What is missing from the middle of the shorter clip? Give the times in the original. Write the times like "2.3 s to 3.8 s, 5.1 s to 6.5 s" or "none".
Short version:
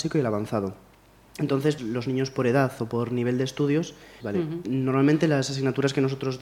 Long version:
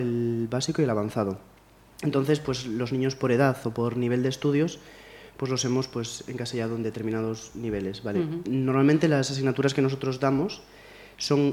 2.4 s to 2.6 s, 5.0 s to 8.0 s